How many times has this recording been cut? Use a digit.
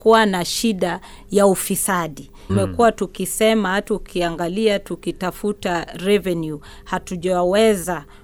1